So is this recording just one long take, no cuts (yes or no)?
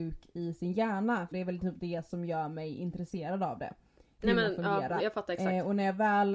no